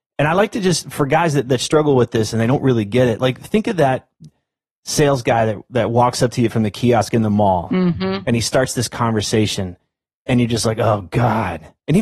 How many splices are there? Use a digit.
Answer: 0